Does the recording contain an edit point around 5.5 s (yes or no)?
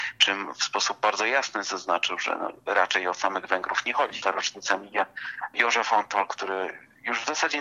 no